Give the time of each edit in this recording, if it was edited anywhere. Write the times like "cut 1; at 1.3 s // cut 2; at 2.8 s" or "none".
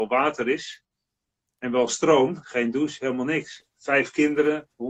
cut 1; at 2.4 s // cut 2; at 3.6 s

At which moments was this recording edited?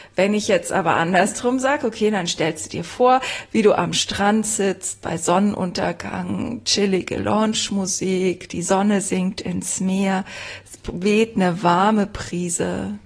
none

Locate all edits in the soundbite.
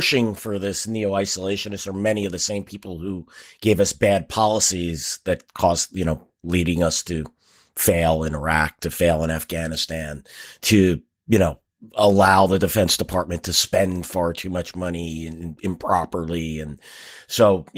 none

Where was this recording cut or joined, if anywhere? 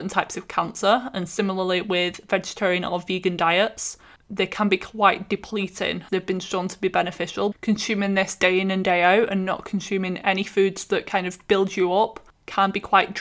cut 1; at 6.1 s // cut 2; at 7.5 s

